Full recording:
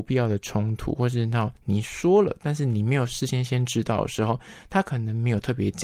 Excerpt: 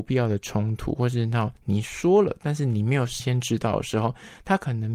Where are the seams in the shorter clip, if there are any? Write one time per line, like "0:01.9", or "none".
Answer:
0:03.2